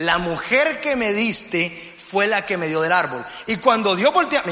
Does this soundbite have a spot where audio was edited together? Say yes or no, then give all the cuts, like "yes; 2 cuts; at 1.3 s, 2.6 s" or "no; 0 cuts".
no; 0 cuts